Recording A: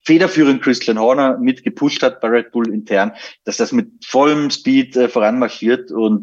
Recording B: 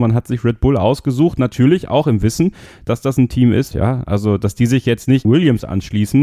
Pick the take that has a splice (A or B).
B